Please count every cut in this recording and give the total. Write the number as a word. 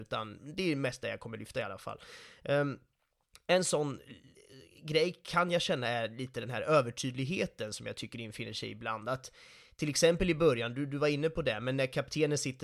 zero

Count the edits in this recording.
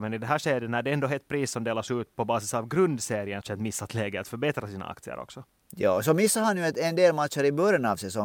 one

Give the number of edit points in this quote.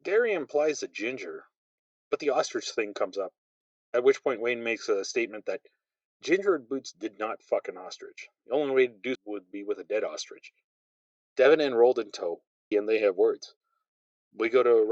three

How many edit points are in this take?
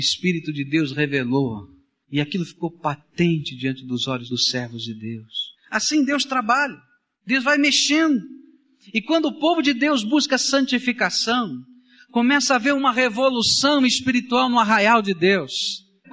zero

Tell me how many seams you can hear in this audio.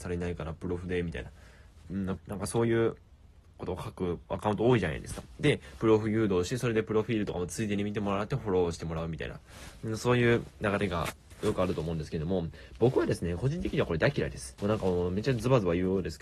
two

